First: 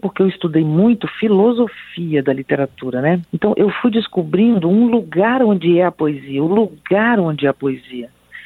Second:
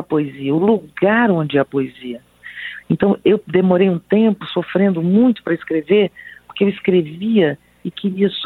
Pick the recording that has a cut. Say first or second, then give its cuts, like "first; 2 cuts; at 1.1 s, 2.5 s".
first; 1 cut; at 3.2 s